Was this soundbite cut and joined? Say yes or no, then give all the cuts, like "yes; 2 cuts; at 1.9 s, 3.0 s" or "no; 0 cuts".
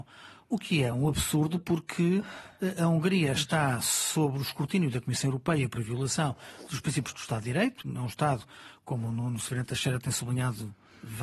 no; 0 cuts